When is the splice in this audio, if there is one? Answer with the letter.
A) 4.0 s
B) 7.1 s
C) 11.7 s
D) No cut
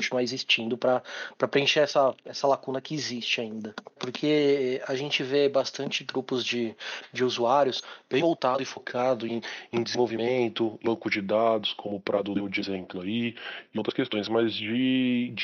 A